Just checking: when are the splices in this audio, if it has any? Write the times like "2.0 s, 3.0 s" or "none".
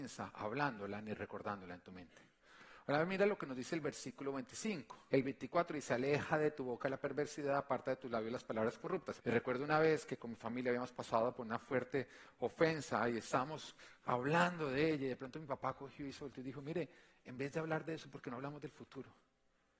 5.1 s, 9.2 s